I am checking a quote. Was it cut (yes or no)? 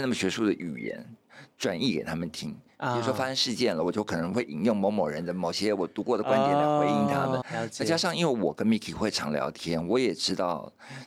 yes